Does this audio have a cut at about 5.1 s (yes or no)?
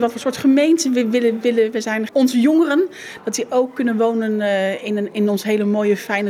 no